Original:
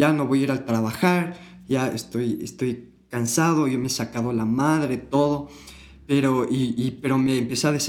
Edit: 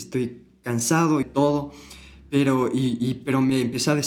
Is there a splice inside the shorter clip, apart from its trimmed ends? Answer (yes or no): yes